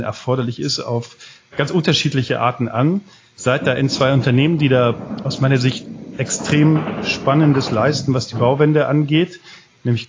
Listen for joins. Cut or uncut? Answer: uncut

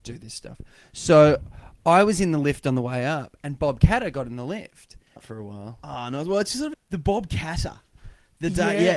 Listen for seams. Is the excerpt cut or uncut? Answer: cut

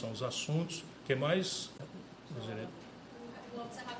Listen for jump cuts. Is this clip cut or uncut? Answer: uncut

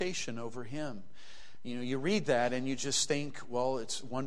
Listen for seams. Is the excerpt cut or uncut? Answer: uncut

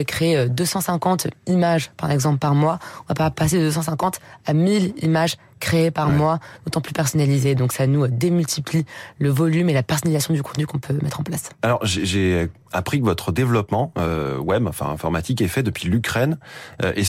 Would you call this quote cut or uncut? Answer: uncut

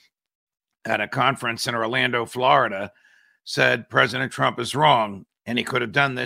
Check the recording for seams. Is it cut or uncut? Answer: cut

